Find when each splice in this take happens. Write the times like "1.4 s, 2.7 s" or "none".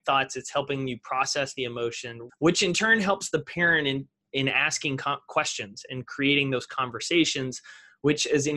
2.3 s